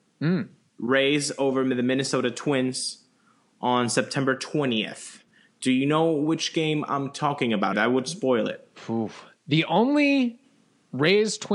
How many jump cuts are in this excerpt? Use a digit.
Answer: 1